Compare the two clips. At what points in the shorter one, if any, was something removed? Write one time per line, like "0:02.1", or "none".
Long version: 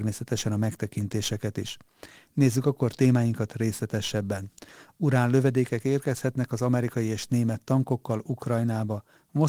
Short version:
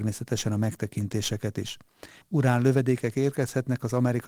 0:02.2

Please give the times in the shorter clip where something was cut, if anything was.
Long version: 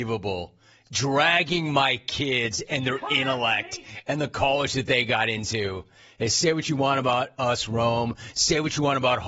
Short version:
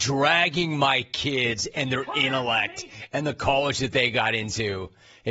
none

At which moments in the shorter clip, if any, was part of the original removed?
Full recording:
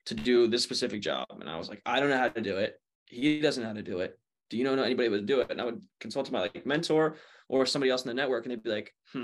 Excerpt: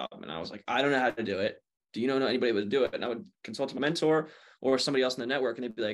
0:01.8
0:03.7

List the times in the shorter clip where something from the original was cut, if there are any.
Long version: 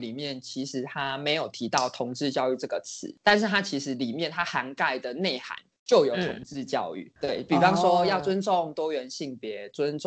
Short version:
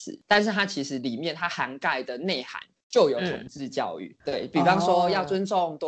none

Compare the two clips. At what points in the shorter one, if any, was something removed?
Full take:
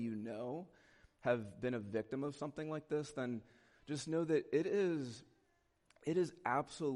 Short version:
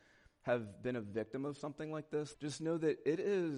0:02.3

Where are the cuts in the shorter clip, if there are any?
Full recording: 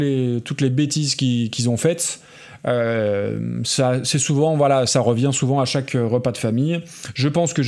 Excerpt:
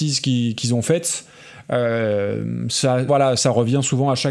0:03.1

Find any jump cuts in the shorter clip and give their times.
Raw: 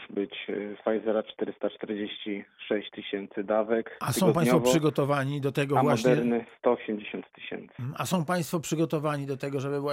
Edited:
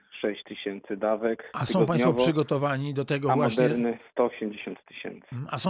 none

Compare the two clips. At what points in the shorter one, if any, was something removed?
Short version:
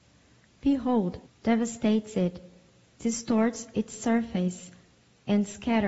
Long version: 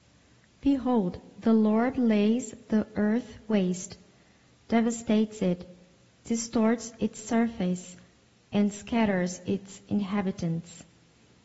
0:01.3

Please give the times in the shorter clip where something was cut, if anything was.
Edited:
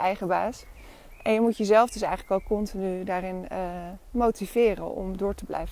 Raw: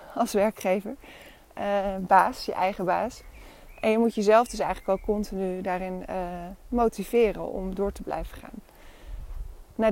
none

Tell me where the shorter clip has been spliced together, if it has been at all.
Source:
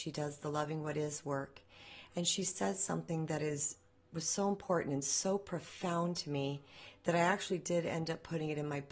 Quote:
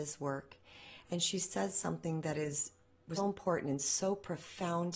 0:03.2

